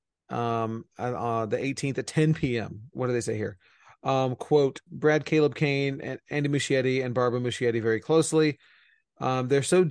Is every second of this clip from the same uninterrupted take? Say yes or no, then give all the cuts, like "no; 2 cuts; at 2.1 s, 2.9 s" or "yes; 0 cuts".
no; 2 cuts; at 2.9 s, 4.9 s